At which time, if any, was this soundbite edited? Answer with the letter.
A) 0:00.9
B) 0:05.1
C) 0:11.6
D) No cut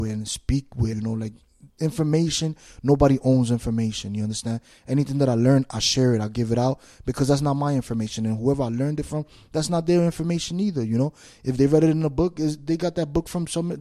A